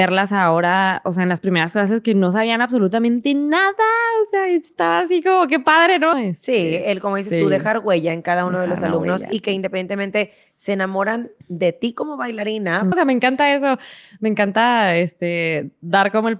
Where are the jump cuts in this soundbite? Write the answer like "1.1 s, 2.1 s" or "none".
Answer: 6.1 s, 12.9 s